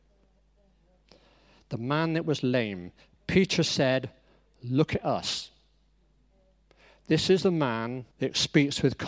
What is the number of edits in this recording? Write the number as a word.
one